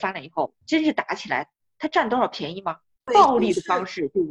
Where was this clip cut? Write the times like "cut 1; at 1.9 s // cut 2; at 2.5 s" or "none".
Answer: cut 1; at 3.0 s